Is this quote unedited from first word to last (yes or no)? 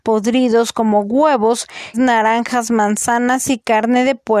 no